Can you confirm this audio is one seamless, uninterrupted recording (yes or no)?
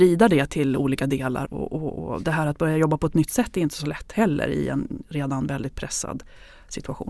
no